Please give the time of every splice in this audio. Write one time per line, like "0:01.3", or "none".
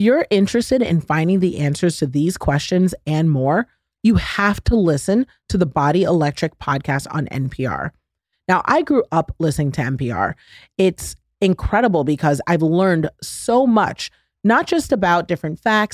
none